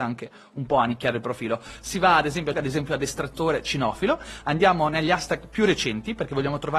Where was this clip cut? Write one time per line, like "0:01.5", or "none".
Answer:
0:02.5